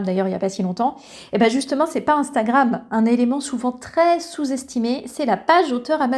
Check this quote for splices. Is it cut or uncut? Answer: uncut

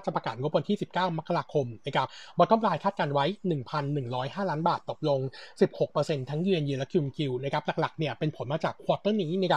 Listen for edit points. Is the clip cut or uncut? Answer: uncut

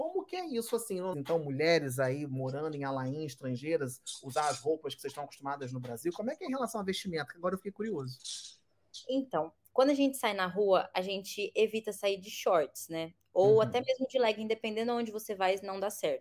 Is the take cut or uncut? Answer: cut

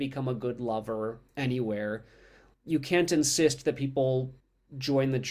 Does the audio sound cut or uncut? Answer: cut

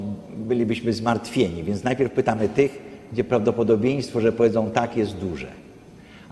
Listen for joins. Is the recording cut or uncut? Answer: uncut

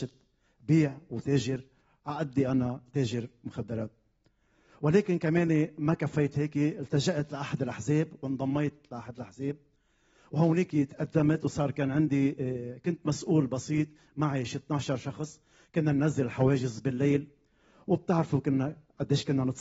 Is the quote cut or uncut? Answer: uncut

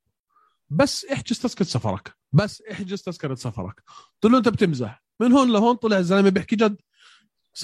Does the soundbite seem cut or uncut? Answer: cut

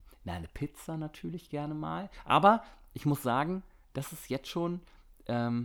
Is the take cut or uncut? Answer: uncut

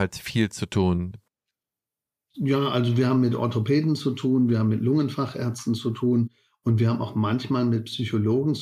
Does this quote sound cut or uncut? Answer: uncut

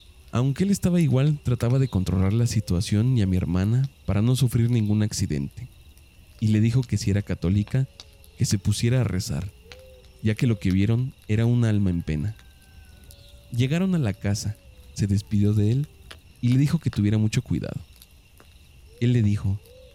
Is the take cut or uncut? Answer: uncut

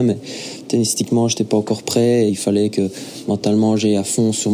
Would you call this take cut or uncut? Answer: uncut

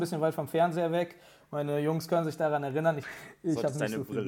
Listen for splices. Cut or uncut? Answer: cut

